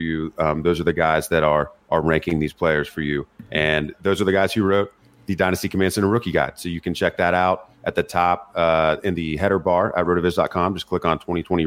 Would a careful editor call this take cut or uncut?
uncut